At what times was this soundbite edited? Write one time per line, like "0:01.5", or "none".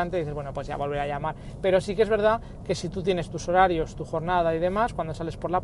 none